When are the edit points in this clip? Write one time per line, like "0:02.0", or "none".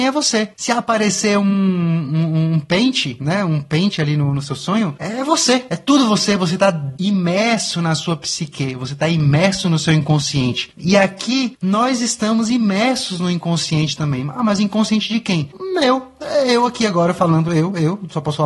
none